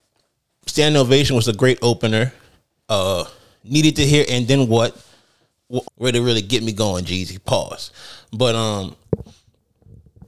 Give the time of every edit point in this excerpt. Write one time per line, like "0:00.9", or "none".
0:05.8